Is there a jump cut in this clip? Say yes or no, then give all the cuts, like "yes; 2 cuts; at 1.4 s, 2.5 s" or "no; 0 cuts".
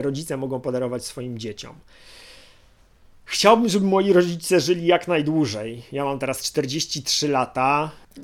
no; 0 cuts